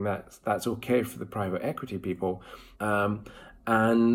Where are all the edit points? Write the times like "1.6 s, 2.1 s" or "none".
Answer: 2.7 s